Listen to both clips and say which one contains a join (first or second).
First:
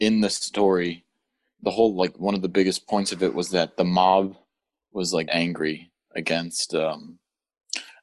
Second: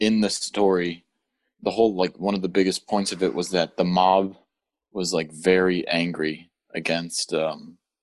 first